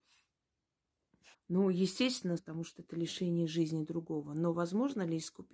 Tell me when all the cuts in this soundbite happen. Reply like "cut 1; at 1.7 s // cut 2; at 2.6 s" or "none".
cut 1; at 1.3 s // cut 2; at 2.4 s

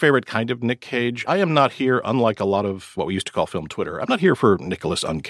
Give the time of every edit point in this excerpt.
none

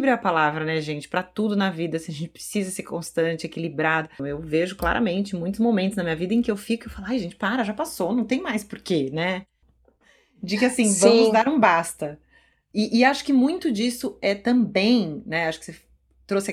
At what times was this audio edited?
cut 1; at 4.2 s // cut 2; at 9.6 s

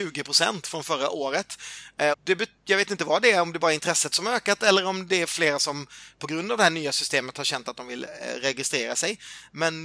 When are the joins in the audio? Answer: cut 1; at 2.1 s

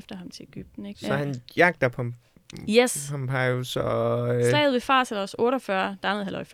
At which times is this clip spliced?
cut 1; at 0.9 s

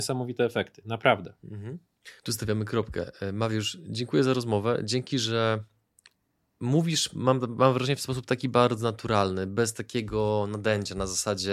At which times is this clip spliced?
cut 1; at 2.2 s

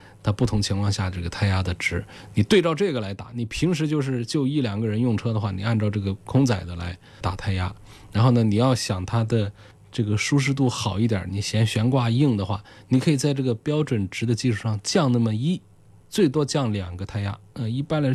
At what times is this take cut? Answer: none

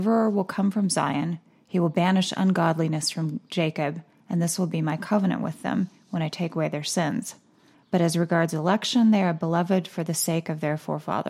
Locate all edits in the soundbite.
cut 1; at 7.7 s

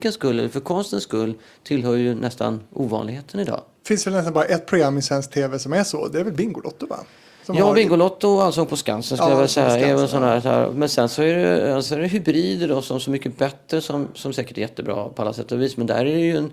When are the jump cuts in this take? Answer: none

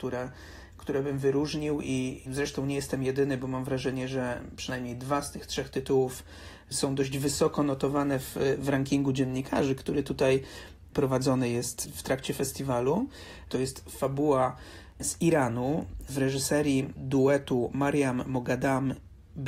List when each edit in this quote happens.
cut 1; at 13.5 s

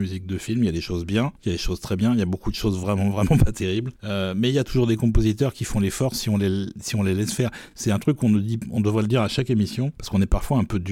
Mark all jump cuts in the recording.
none

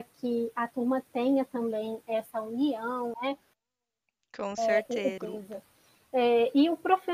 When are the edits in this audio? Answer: cut 1; at 3.1 s // cut 2; at 5.2 s

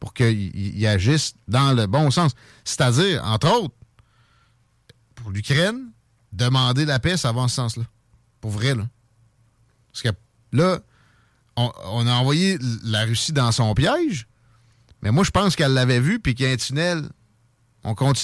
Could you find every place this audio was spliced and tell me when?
none

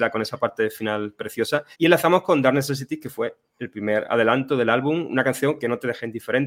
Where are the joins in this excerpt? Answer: cut 1; at 1.7 s

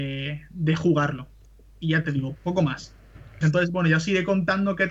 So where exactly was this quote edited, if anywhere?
cut 1; at 2.4 s // cut 2; at 3.4 s

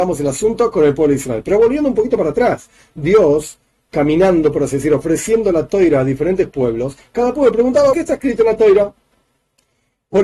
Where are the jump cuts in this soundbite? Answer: cut 1; at 7.9 s

